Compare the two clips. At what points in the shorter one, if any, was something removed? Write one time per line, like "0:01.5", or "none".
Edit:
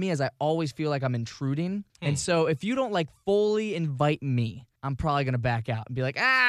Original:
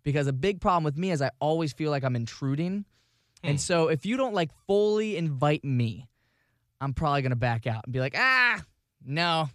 0:01.9
0:04.8